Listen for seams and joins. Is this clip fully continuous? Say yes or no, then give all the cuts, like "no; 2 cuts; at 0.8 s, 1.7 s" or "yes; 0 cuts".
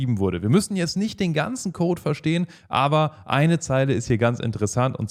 yes; 0 cuts